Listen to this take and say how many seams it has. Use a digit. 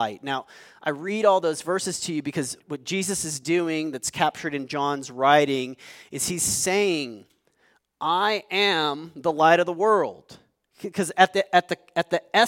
2